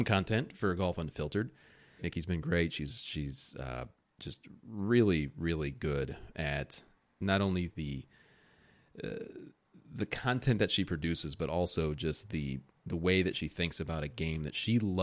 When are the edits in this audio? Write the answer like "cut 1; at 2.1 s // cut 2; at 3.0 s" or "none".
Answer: cut 1; at 2.0 s